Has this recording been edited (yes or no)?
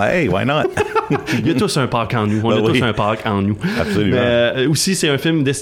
no